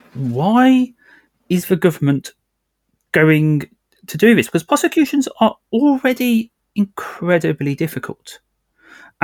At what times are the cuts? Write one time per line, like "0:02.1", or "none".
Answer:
none